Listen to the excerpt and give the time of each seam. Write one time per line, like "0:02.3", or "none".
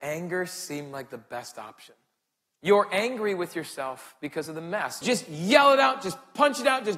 0:02.5
0:05.0